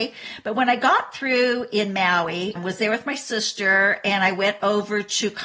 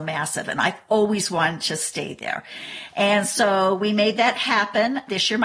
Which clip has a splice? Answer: first; 1 cut; at 2.6 s

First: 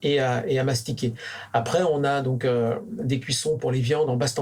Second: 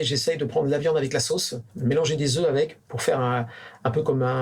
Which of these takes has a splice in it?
second; 1 cut; at 1.7 s

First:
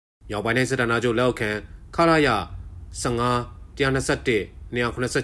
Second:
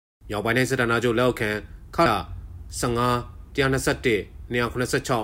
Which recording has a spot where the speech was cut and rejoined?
second; 1 cut; at 2.1 s

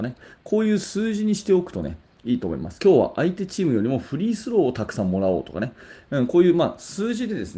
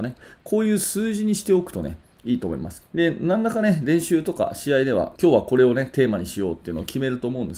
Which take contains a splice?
second; 2 cuts; at 2.8 s, 5.2 s

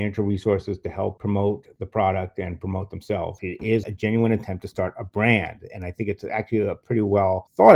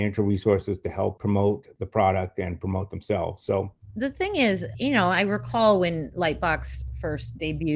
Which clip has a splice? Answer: first; 1 cut; at 3.4 s

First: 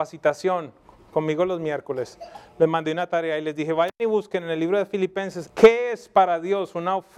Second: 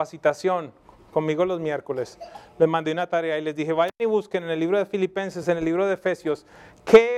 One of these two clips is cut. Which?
first; 1 cut; at 5.4 s

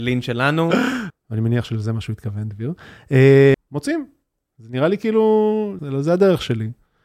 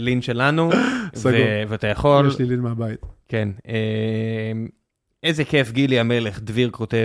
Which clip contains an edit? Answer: first; 3 cuts; at 1.1 s, 3.5 s, 5.8 s

